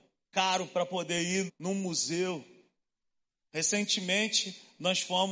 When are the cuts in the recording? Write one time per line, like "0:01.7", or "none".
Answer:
0:01.5